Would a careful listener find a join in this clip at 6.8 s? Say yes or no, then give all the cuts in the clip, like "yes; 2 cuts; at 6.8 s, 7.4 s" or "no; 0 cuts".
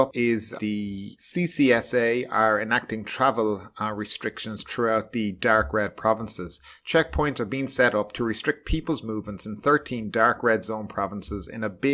no; 0 cuts